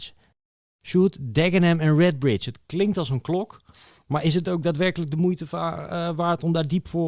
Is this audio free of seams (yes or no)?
yes